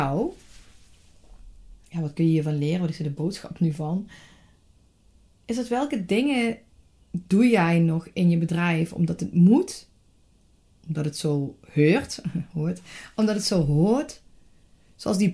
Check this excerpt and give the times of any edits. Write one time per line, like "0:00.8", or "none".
none